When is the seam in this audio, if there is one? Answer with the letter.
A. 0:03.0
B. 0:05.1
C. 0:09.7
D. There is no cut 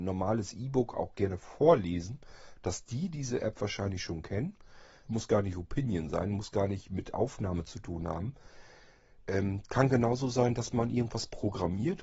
B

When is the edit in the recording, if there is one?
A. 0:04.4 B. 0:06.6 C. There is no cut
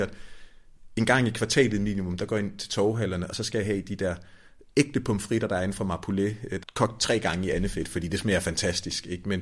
B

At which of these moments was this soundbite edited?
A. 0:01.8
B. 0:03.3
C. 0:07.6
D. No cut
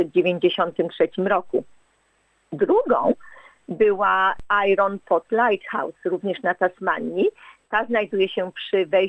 D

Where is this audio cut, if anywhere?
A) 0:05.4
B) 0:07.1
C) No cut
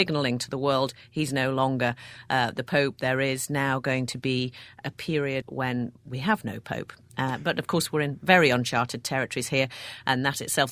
A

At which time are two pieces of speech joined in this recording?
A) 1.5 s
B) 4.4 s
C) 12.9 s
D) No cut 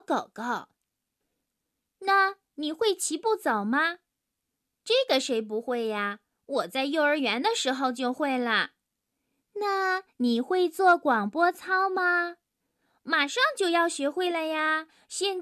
A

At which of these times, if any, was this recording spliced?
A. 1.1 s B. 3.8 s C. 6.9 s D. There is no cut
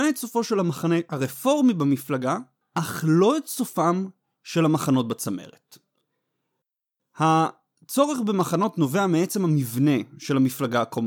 D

